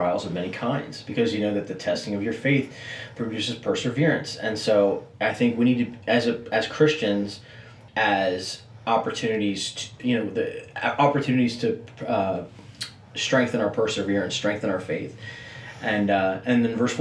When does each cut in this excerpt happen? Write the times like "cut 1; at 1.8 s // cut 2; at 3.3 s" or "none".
cut 1; at 7.9 s // cut 2; at 10.0 s